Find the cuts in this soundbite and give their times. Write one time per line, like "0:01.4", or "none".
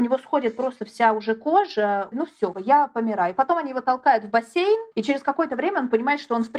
0:02.5
0:04.9